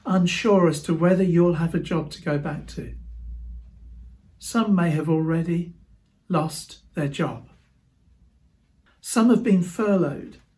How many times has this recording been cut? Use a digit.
1